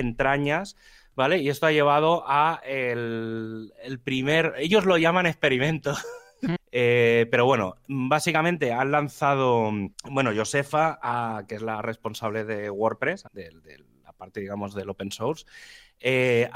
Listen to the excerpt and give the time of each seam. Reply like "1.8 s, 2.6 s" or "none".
6.6 s, 9.9 s, 13.3 s